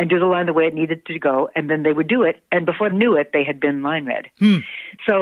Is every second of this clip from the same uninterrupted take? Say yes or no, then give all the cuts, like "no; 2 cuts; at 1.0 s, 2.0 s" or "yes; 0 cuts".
no; 1 cut; at 2.9 s